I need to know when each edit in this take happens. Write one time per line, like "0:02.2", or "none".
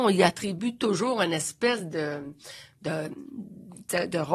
none